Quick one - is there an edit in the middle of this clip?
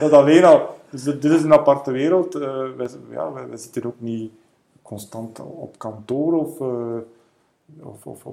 no; 0 cuts

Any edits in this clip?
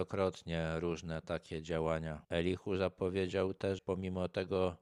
yes; 2 cuts; at 2.2 s, 3.8 s

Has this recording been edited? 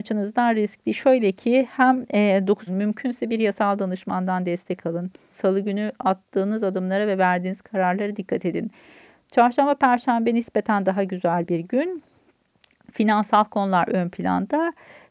yes; 2 cuts; at 2.7 s, 5.3 s

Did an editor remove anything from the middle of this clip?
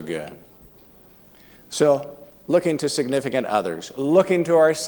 no; 0 cuts

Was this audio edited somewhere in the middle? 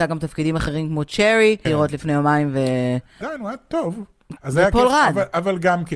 yes; 3 cuts; at 1.7 s, 3.2 s, 4.4 s

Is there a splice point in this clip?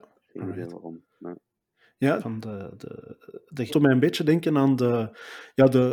yes; 2 cuts; at 2.2 s, 3.7 s

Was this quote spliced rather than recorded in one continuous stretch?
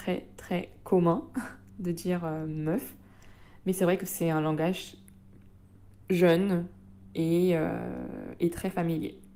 no; 0 cuts

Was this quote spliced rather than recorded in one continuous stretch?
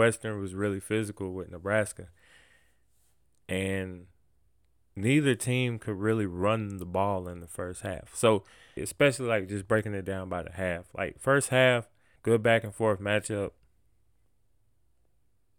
yes; 2 cuts; at 8.8 s, 12.2 s

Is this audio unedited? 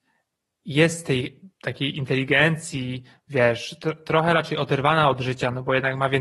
yes; 0 cuts

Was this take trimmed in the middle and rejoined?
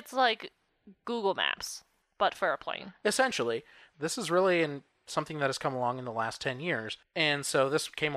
yes; 1 cut; at 3.9 s

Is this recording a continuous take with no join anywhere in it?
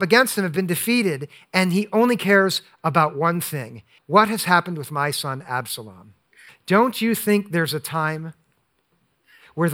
no; 2 cuts; at 4.0 s, 6.5 s

